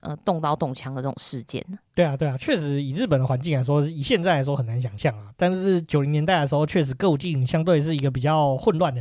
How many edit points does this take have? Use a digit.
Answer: 0